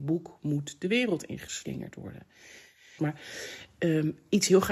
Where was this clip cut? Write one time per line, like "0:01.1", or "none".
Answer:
0:03.0

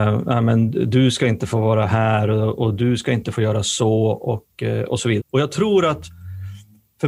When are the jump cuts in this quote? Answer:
0:05.2

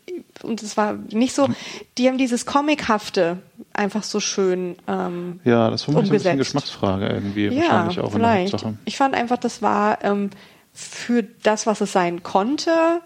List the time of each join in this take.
0:01.1

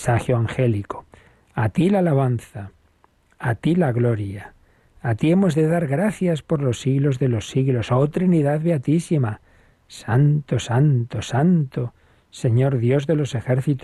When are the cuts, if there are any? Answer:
none

